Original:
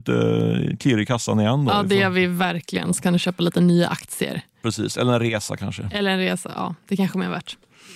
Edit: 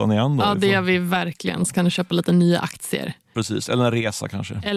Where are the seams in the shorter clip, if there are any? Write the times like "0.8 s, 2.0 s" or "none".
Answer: none